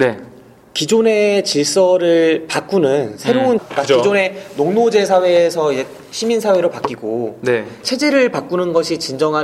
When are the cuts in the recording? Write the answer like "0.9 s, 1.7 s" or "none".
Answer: 3.6 s, 7.8 s